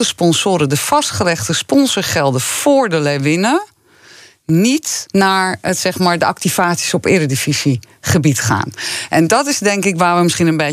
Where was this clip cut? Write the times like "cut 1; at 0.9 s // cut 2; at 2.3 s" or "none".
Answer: cut 1; at 5.1 s